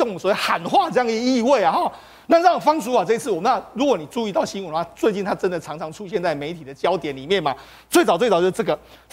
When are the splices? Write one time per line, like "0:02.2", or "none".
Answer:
none